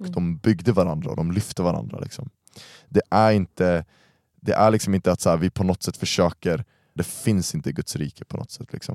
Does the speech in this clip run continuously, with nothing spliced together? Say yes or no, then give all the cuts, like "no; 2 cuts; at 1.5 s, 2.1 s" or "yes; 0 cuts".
no; 1 cut; at 7.0 s